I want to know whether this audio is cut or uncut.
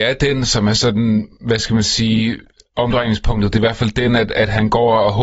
uncut